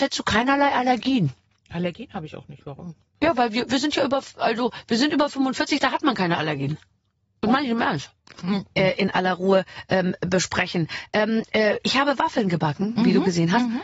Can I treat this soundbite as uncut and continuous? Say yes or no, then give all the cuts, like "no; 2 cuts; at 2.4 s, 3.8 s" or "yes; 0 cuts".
no; 1 cut; at 8.8 s